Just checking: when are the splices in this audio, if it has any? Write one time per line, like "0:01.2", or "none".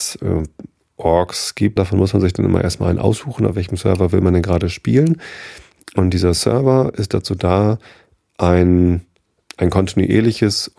0:01.8
0:09.5